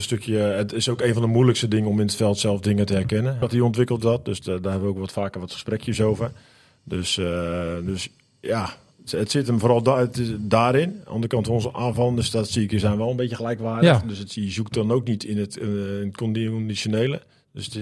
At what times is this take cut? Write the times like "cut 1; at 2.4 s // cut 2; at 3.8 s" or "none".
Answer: cut 1; at 3.4 s